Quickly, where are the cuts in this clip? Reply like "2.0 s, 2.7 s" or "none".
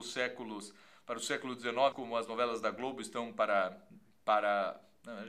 1.9 s